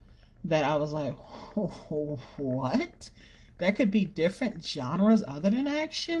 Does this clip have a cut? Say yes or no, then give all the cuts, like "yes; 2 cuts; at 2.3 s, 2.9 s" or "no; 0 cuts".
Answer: no; 0 cuts